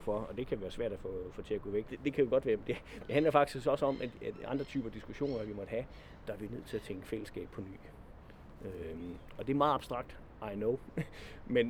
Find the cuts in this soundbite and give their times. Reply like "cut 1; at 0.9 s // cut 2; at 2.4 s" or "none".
cut 1; at 1.9 s